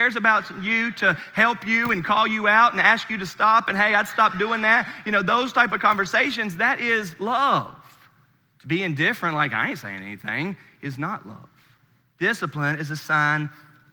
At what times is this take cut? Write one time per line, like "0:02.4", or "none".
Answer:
0:12.0

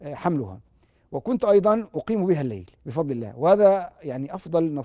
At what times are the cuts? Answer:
0:02.8

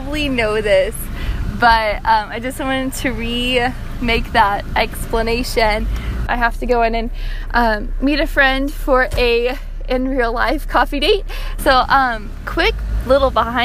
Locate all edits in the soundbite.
0:06.3
0:11.6

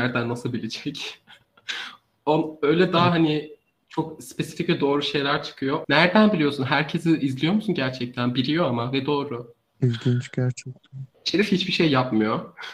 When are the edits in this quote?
0:05.8
0:11.1

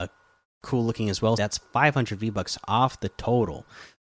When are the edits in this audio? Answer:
0:01.4

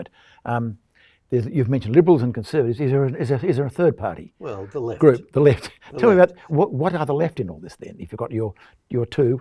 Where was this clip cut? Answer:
0:06.5

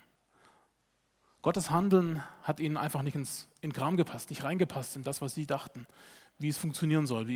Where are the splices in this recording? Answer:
none

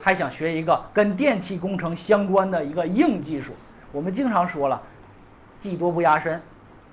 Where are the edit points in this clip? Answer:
none

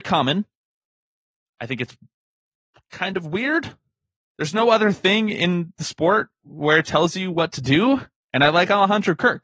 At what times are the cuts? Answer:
0:06.8
0:08.2

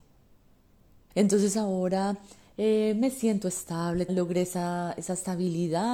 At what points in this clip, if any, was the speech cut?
0:01.1
0:04.1

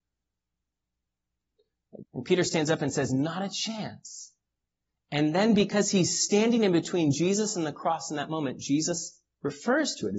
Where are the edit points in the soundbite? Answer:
0:02.0

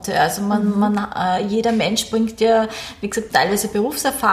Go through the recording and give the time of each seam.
0:03.3

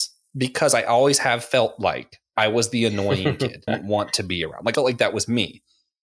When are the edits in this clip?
0:03.7
0:04.7

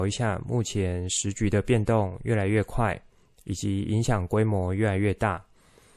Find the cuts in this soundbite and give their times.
none

